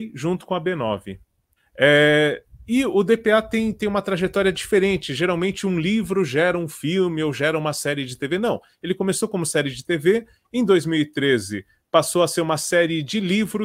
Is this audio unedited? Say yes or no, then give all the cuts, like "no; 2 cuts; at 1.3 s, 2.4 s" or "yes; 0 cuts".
no; 1 cut; at 1.6 s